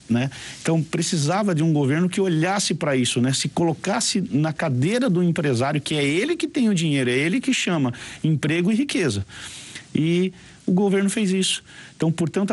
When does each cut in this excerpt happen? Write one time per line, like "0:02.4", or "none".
none